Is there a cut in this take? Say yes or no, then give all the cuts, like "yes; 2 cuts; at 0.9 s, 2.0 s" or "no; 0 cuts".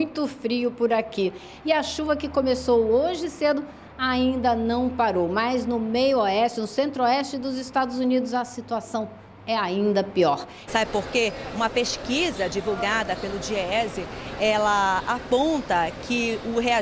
yes; 1 cut; at 10.7 s